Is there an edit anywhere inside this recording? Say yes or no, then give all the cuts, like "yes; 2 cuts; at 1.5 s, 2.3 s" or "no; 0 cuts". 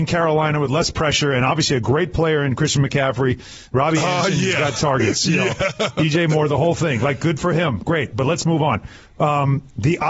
no; 0 cuts